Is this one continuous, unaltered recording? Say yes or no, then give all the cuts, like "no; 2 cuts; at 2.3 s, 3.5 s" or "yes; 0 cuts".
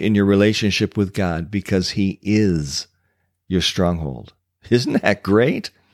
yes; 0 cuts